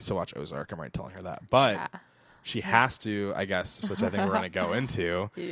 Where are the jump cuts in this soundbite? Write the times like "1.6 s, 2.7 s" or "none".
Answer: 3.8 s